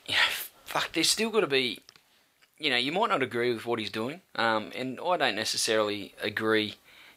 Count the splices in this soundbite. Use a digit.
0